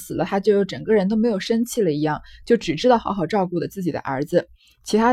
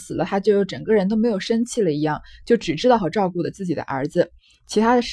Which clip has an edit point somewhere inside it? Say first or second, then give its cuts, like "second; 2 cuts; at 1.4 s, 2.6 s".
second; 1 cut; at 3.0 s